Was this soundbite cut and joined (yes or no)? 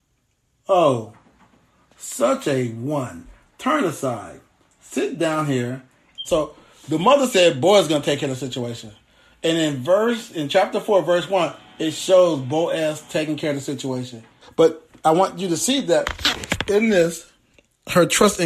yes